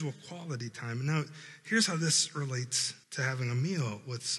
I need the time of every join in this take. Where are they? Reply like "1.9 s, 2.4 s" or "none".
3.0 s